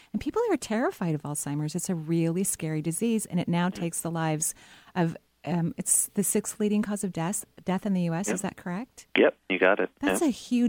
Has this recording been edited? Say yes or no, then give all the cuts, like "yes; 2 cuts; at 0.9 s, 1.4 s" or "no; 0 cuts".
no; 0 cuts